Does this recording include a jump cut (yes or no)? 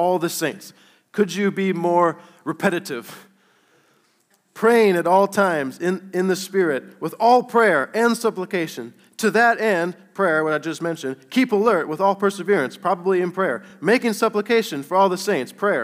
no